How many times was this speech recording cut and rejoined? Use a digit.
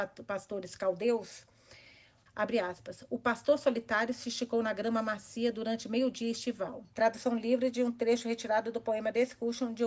2